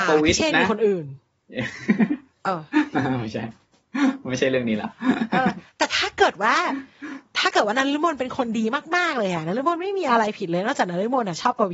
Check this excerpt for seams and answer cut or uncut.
uncut